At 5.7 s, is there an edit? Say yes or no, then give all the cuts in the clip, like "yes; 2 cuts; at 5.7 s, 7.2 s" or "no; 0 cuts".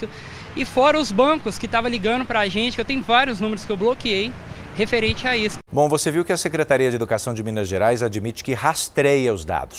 yes; 1 cut; at 5.7 s